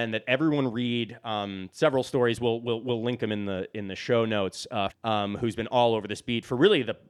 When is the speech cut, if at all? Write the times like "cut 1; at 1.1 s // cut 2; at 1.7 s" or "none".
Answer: cut 1; at 4.9 s